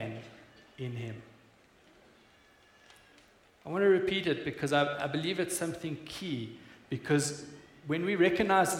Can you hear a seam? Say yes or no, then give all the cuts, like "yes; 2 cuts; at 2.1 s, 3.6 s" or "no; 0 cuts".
no; 0 cuts